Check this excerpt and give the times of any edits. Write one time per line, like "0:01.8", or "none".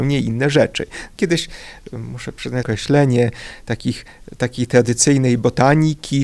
0:01.2
0:02.6